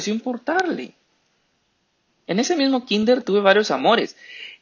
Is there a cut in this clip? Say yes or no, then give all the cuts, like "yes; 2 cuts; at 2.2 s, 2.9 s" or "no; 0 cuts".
yes; 1 cut; at 2.1 s